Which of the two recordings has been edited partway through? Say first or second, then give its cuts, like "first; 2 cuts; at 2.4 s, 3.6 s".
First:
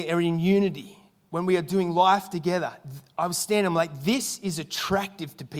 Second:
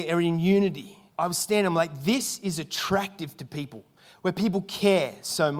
second; 2 cuts; at 1.1 s, 4.1 s